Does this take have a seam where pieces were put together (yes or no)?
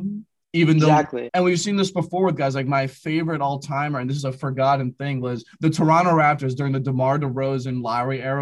yes